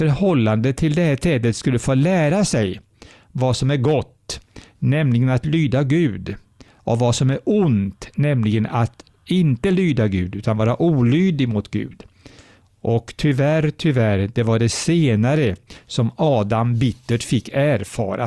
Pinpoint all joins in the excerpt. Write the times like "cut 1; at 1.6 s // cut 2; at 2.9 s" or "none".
none